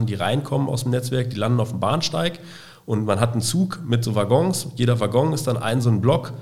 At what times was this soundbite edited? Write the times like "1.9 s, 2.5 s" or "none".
none